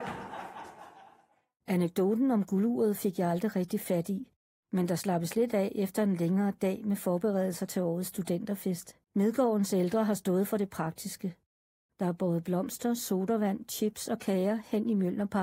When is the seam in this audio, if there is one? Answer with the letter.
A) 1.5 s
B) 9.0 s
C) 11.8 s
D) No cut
B